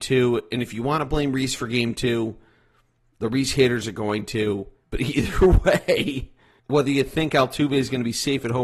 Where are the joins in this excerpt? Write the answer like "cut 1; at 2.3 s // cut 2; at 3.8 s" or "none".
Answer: cut 1; at 4.8 s // cut 2; at 6.6 s